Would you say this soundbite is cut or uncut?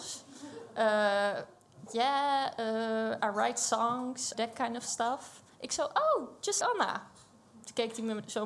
cut